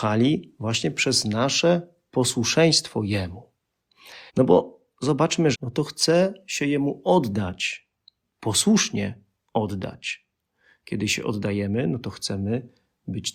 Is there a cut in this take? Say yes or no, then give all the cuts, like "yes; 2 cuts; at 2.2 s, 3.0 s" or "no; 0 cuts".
yes; 3 cuts; at 4.3 s, 5.5 s, 8.2 s